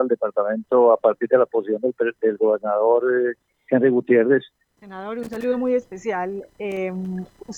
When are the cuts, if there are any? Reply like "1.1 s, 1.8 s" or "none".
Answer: 4.8 s